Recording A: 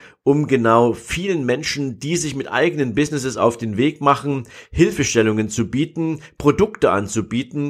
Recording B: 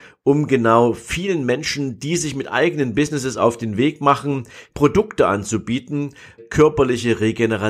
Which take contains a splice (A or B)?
B